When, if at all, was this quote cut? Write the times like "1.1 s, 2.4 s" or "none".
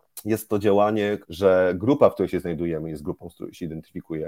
1.2 s